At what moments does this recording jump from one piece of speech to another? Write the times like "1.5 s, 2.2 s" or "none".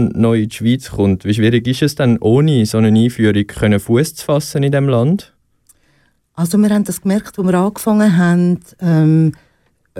none